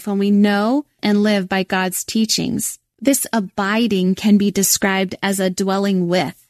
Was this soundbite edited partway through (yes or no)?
yes